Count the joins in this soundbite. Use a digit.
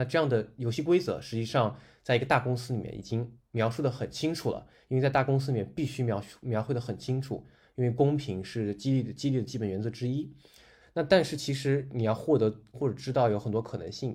2